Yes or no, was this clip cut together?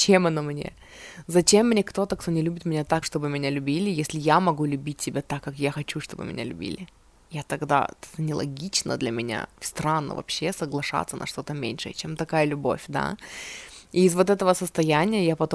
yes